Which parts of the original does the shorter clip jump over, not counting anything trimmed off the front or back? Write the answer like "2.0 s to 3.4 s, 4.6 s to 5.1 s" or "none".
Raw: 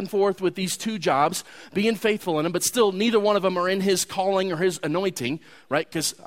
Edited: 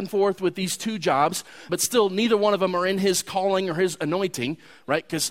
1.7 s to 2.5 s